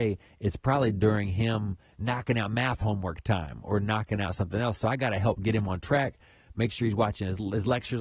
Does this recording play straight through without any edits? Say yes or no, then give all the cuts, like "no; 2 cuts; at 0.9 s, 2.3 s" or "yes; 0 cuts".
yes; 0 cuts